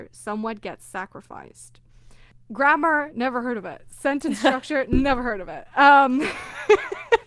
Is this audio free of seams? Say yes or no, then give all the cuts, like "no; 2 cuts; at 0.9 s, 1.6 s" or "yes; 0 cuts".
yes; 0 cuts